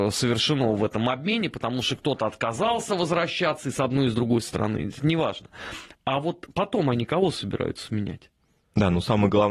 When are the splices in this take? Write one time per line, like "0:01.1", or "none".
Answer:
none